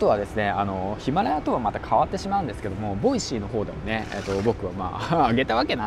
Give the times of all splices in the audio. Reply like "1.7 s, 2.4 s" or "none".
none